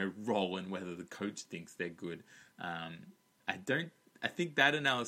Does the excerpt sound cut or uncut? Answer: uncut